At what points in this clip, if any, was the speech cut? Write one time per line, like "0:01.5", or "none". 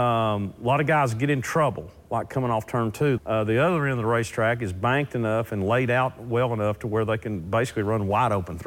0:03.2